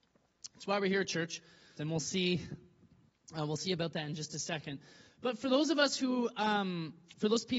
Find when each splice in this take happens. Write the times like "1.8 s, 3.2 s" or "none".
1.8 s